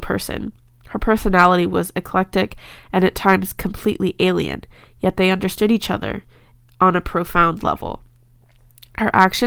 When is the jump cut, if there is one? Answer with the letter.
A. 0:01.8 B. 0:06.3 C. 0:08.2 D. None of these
D